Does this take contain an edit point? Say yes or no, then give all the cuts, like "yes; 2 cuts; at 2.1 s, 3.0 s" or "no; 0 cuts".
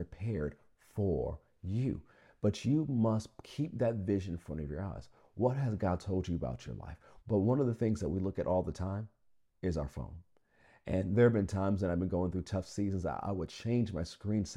yes; 1 cut; at 7.2 s